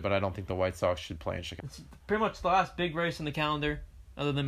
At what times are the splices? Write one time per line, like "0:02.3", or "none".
0:01.6